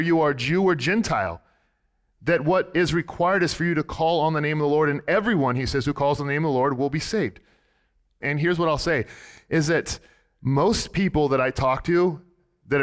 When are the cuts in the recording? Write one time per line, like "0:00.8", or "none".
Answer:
0:08.2

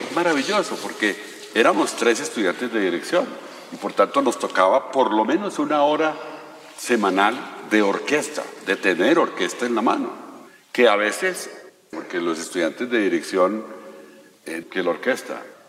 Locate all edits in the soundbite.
0:11.9
0:14.6

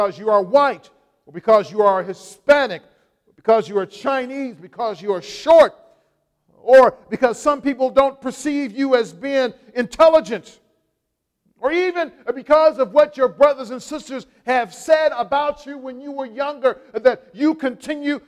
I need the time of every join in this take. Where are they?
none

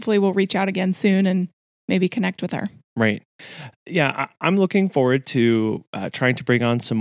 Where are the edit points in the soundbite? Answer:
none

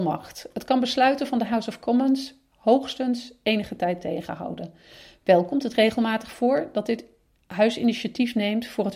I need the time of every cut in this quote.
none

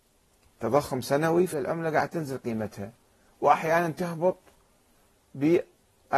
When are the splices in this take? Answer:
0:01.5

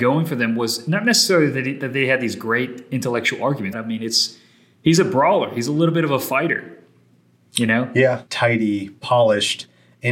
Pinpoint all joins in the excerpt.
0:03.7
0:08.3

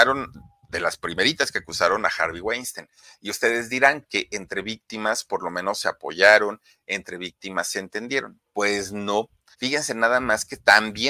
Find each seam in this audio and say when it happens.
0:04.0
0:09.5

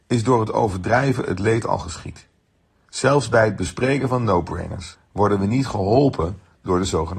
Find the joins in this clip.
0:02.9
0:04.9

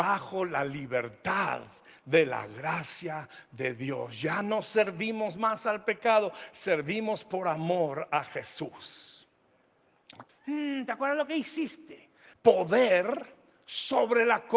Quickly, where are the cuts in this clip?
0:10.3
0:12.3

